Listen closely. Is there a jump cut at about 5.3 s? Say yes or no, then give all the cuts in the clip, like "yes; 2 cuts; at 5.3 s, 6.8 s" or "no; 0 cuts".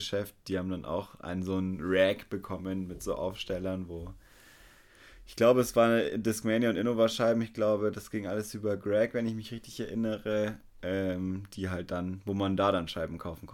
no; 0 cuts